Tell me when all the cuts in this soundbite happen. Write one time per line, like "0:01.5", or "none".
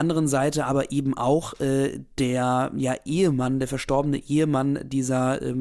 none